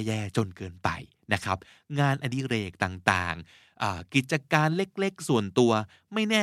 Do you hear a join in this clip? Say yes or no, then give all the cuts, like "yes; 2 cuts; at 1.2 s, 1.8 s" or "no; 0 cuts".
no; 0 cuts